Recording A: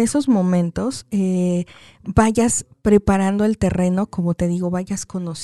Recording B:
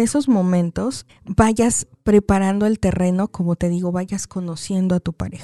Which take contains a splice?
B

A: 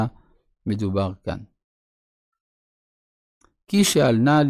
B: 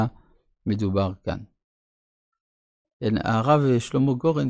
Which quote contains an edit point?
B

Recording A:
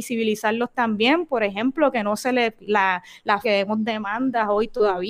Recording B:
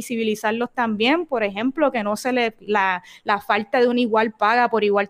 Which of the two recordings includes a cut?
A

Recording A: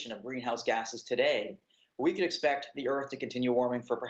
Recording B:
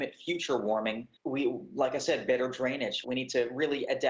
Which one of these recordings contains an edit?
B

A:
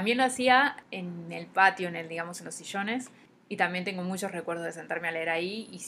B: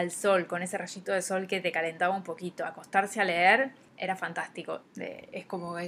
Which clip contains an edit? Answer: B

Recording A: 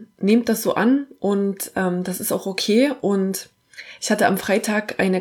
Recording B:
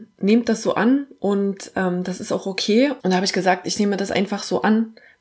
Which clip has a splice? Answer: B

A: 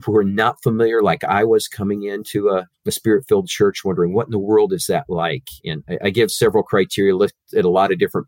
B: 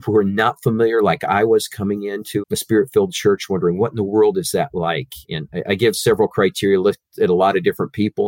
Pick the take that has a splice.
B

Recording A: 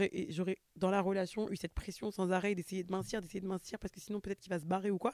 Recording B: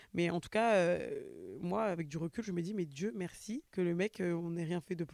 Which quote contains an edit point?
B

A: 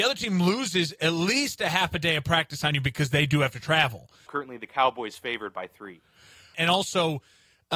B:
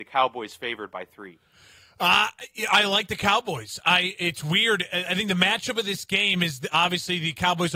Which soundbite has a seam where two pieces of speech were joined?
A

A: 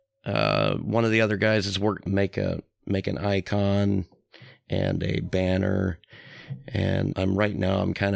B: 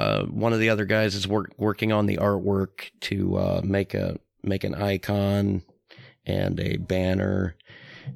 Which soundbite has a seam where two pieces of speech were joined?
A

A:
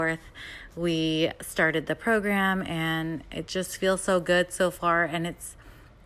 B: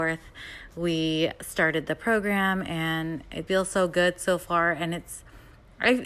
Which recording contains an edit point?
B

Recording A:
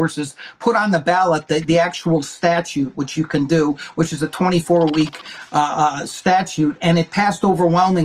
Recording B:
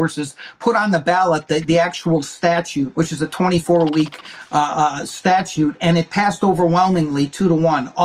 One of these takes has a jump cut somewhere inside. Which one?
B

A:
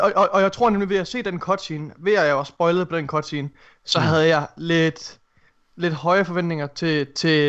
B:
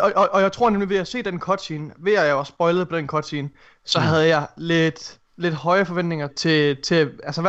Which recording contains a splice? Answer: B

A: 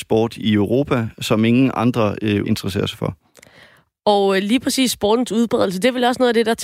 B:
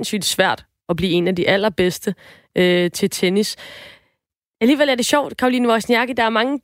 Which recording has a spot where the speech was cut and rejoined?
A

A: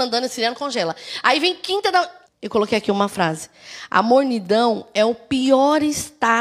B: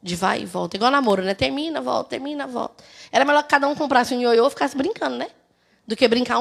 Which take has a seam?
A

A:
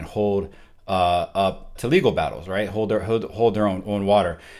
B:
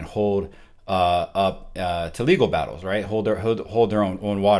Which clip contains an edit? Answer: A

